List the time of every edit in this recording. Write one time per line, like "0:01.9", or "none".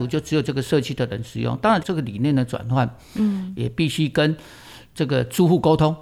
0:01.8